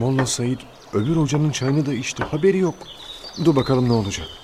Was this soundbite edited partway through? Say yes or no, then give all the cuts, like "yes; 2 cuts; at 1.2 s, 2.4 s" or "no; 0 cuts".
no; 0 cuts